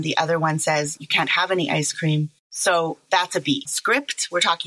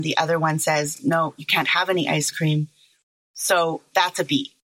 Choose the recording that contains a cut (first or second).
first